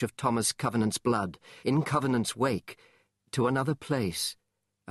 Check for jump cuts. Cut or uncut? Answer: cut